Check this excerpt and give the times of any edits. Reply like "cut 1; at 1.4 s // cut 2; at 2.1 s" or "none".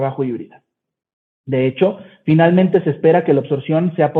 cut 1; at 1.4 s